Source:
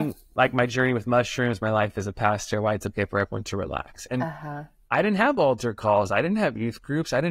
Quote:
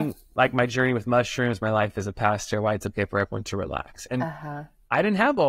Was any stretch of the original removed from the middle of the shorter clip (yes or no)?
no